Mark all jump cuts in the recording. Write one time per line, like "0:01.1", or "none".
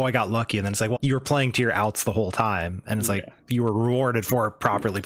0:00.9